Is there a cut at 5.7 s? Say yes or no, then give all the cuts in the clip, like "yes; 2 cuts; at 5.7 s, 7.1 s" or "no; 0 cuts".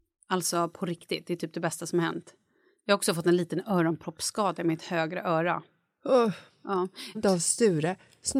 no; 1 cut; at 7.1 s